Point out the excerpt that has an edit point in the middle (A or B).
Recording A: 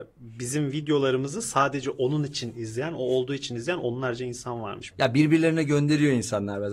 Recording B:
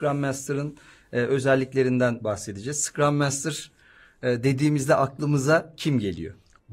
A